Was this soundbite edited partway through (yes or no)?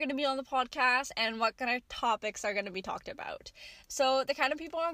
no